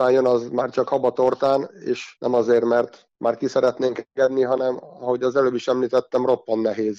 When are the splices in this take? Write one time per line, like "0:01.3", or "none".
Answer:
none